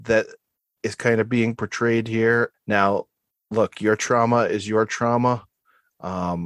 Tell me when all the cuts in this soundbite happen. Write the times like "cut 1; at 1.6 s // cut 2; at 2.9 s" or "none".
cut 1; at 2.5 s